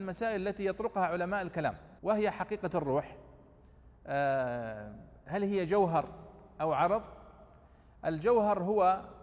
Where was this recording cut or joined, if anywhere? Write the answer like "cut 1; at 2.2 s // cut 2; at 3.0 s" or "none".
cut 1; at 2.0 s